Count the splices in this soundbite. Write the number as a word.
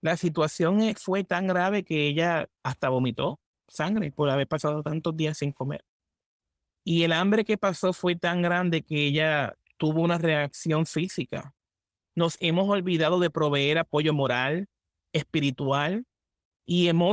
two